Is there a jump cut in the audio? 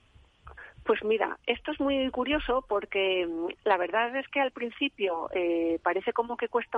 no; 0 cuts

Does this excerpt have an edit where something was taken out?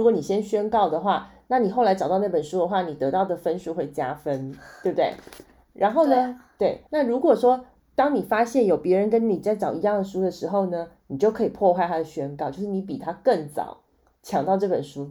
yes; 1 cut; at 6.9 s

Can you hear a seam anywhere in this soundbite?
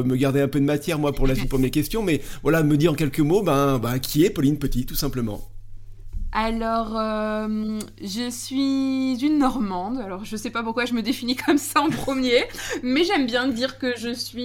no; 0 cuts

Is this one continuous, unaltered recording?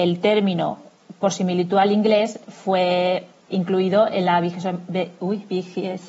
no; 1 cut; at 3.5 s

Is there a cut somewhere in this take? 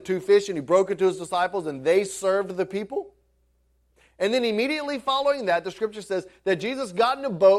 no; 0 cuts

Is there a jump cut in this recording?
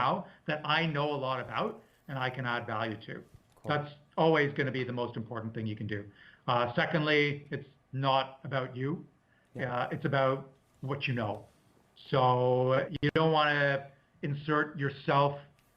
no; 0 cuts

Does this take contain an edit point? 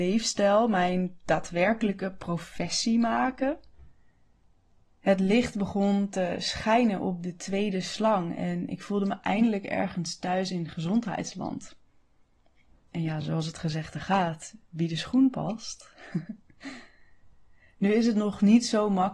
no; 0 cuts

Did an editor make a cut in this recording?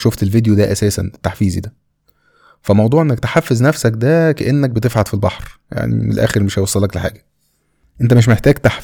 no; 0 cuts

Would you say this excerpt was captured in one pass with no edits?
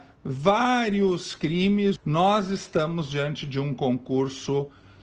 no; 1 cut; at 2.0 s

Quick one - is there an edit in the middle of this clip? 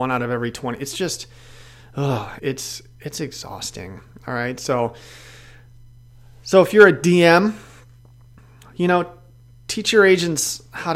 yes; 1 cut; at 2.4 s

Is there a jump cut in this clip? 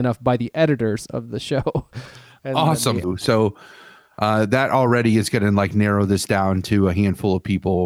yes; 1 cut; at 3.0 s

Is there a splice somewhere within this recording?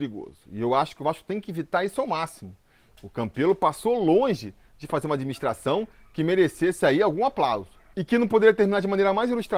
yes; 2 cuts; at 2.9 s, 7.9 s

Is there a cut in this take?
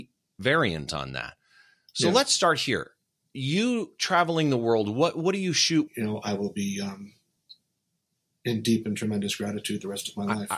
yes; 1 cut; at 5.9 s

